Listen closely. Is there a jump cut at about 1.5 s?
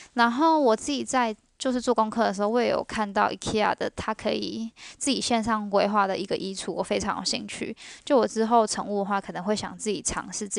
no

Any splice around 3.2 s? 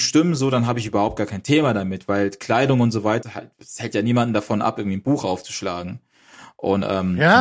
yes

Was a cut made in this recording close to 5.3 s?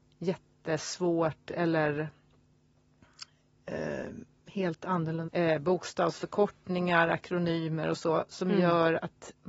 yes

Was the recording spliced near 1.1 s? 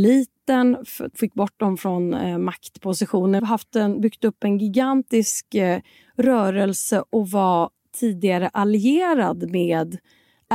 no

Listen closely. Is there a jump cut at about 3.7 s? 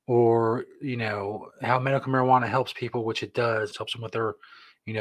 yes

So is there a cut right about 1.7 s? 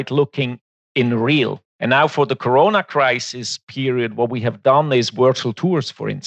no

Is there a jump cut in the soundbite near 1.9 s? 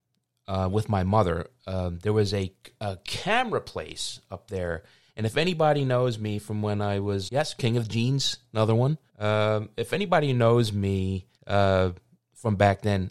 no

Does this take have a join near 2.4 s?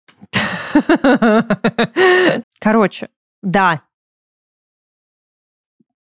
yes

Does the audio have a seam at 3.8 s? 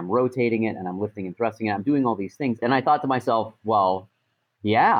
no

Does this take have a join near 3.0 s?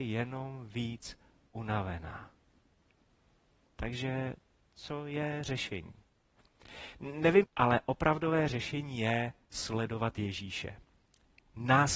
no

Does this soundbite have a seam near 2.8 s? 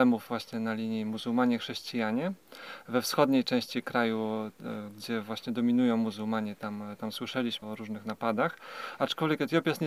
no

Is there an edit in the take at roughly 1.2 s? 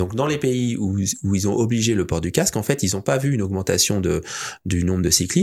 no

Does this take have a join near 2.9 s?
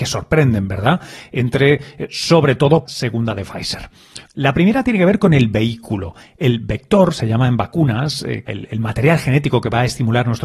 yes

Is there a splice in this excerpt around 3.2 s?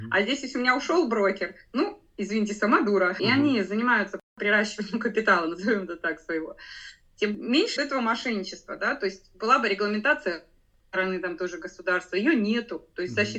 yes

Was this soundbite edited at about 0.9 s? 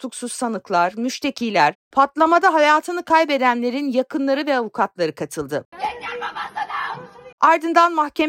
no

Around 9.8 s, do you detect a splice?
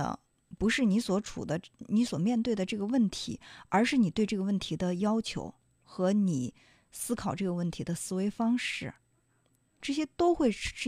yes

